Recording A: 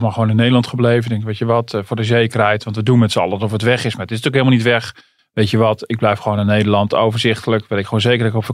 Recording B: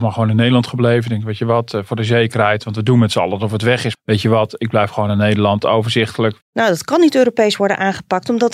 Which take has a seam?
B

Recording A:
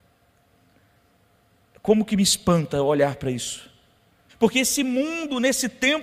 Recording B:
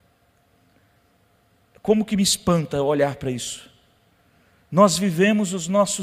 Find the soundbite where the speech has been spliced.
A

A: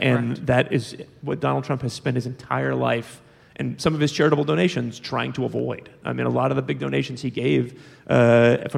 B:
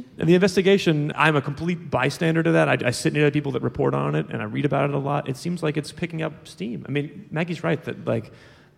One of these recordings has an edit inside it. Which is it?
B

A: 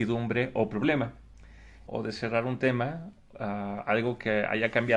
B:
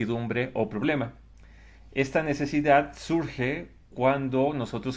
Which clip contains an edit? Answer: A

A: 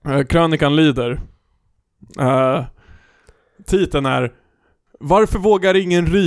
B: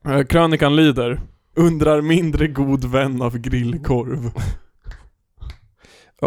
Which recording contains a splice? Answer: B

